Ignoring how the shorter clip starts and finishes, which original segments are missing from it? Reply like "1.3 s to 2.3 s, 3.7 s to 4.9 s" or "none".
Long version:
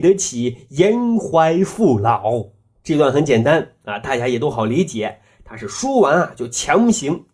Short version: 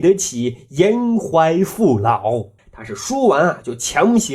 2.6 s to 5.3 s